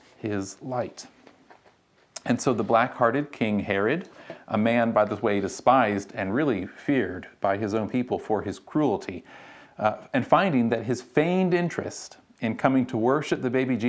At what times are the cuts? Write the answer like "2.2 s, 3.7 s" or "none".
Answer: none